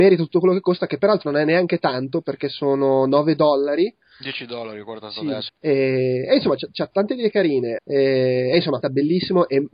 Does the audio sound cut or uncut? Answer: cut